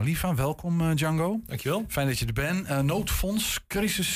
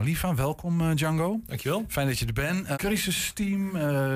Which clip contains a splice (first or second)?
second